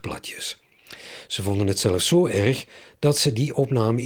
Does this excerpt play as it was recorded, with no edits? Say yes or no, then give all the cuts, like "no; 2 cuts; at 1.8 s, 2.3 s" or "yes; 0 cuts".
yes; 0 cuts